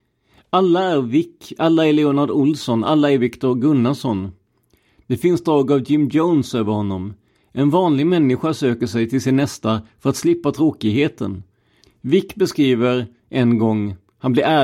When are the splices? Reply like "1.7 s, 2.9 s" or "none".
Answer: 11.8 s